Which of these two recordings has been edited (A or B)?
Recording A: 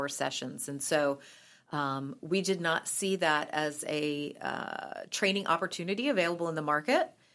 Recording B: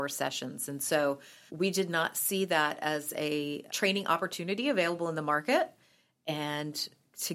B